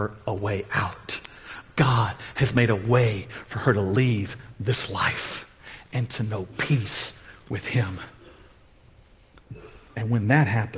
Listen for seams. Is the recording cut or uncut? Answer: uncut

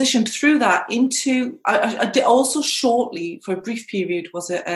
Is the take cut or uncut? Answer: uncut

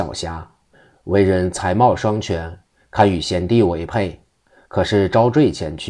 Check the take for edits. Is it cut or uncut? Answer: uncut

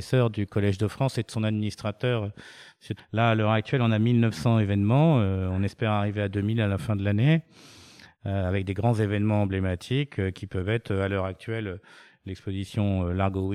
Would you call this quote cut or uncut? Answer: cut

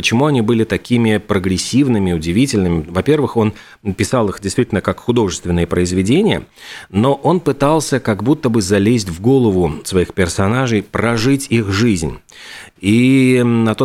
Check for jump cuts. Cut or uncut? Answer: cut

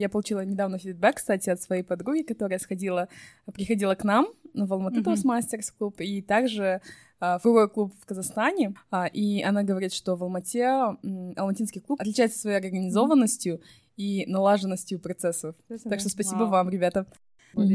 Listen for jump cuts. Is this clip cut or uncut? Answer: uncut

